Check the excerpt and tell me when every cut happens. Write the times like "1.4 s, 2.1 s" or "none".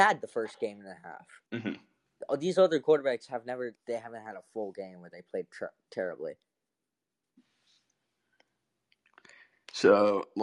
1.5 s, 3.8 s